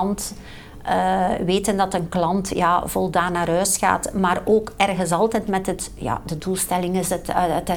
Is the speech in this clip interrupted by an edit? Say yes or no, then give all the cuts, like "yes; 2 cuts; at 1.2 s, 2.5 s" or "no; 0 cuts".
no; 0 cuts